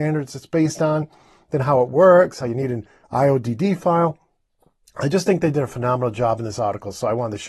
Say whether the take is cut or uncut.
uncut